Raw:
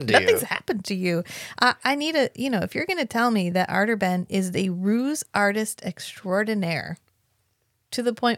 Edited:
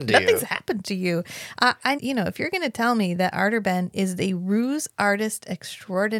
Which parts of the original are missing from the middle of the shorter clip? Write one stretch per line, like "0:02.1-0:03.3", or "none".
0:02.0-0:02.3